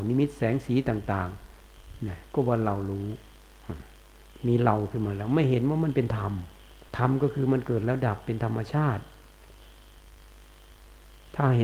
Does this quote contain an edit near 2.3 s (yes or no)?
yes